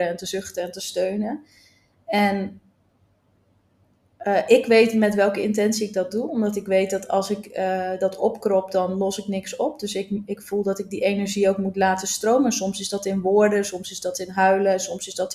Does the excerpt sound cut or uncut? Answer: uncut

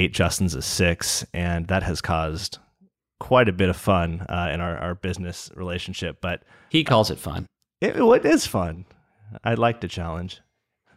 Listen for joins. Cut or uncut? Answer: uncut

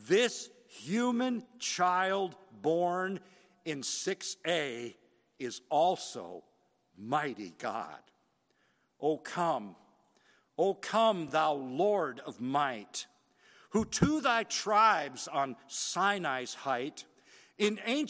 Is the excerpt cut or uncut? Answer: uncut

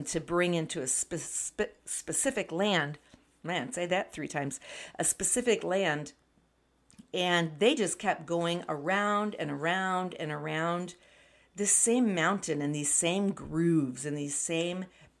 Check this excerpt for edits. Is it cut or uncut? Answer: uncut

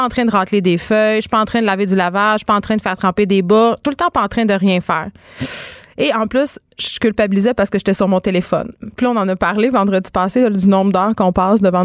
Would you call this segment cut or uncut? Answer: uncut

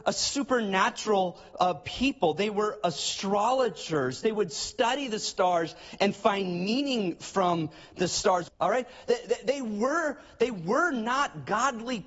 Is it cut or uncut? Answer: cut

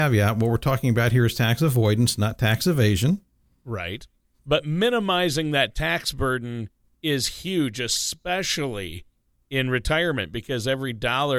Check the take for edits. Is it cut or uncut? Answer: uncut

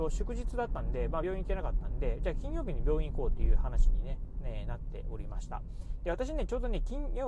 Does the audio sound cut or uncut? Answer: uncut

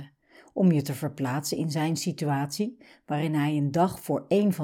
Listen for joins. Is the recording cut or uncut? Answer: uncut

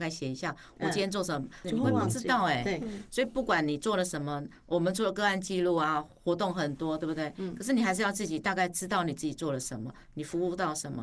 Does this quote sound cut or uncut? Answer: cut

